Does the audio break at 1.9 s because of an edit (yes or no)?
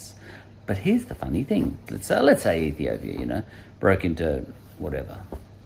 yes